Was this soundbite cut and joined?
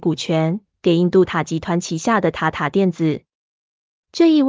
yes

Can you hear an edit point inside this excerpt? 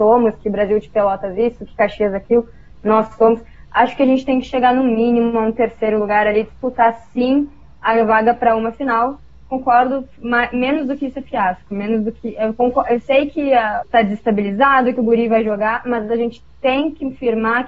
yes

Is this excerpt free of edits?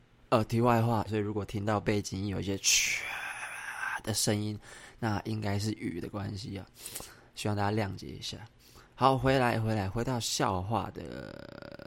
no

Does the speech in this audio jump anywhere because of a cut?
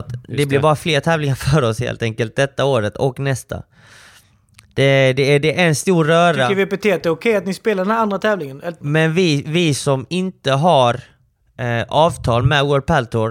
yes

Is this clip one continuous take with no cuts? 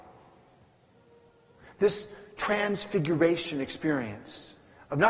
yes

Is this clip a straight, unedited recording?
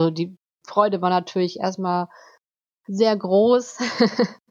yes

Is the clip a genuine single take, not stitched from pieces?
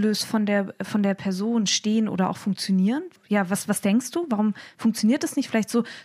yes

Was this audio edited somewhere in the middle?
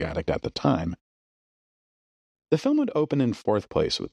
no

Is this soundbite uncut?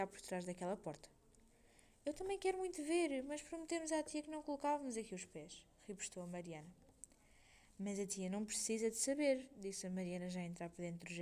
yes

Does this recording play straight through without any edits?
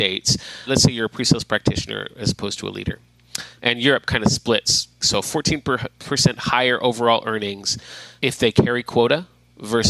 no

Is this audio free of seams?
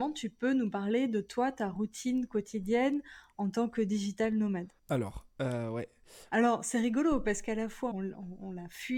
no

